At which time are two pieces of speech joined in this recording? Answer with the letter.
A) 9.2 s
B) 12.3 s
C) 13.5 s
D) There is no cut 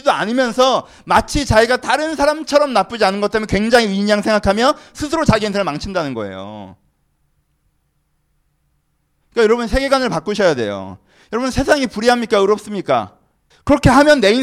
C